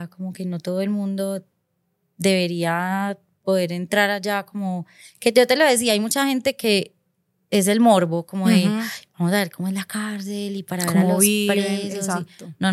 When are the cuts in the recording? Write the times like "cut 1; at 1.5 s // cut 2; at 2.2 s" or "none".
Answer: none